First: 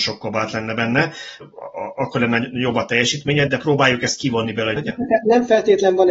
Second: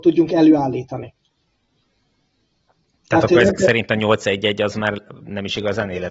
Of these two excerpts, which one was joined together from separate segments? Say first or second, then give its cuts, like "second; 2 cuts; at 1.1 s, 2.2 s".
first; 3 cuts; at 1.4 s, 3.5 s, 4.8 s